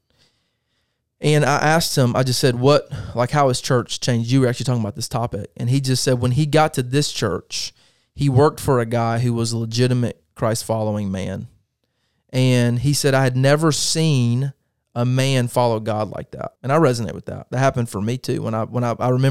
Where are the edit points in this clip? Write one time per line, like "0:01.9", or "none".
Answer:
0:16.6